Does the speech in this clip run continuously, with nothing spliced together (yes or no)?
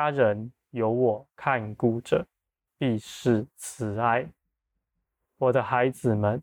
no